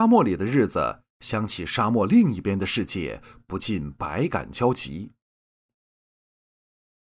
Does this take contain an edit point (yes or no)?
yes